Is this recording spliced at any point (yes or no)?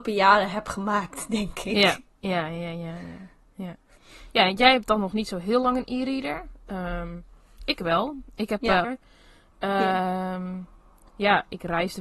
yes